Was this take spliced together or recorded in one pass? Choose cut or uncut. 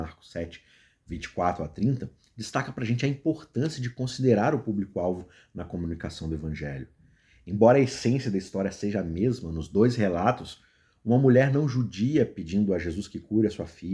uncut